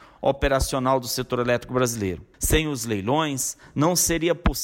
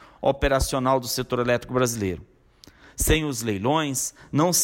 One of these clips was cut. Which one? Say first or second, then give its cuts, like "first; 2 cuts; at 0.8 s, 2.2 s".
first; 1 cut; at 2.3 s